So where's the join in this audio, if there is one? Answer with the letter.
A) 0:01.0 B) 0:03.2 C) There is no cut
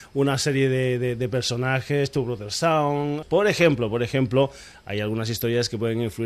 B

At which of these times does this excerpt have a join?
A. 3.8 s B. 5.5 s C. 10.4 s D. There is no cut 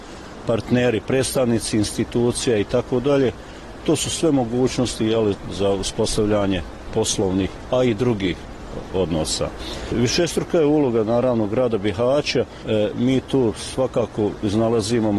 D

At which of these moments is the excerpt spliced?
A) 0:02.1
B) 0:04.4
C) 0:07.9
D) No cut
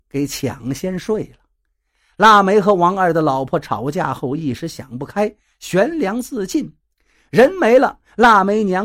D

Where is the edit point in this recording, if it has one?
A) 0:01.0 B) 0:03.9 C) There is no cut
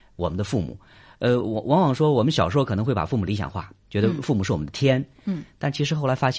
C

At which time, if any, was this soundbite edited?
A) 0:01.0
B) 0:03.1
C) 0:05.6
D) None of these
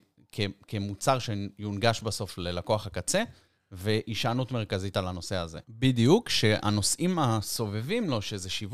C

